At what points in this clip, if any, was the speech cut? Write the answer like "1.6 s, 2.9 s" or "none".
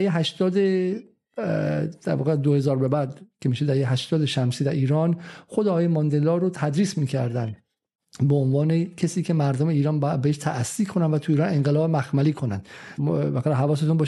13.0 s

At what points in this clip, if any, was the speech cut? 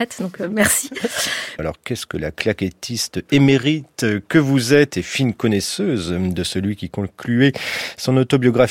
1.6 s

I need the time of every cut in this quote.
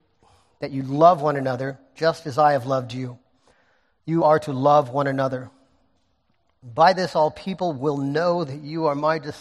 4.2 s

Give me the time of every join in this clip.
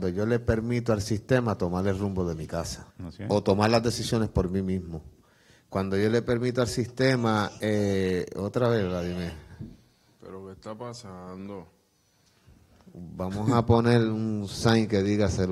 2.9 s

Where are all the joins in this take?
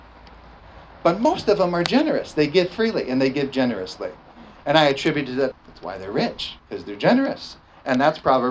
5.5 s, 6.6 s

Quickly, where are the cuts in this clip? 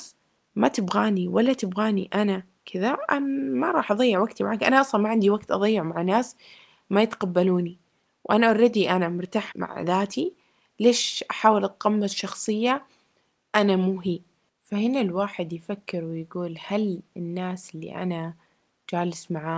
9.5 s

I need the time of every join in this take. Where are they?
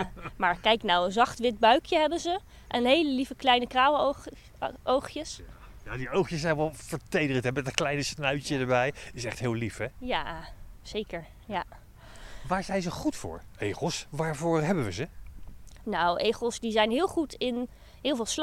none

